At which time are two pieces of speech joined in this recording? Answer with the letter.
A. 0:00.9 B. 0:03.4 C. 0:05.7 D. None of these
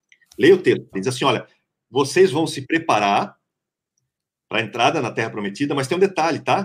A